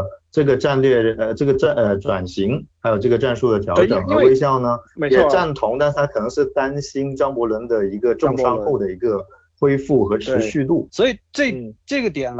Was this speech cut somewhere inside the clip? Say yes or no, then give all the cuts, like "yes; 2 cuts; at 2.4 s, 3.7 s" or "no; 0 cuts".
yes; 1 cut; at 10.9 s